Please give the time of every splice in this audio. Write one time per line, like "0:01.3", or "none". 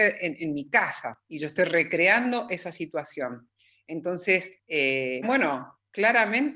0:05.2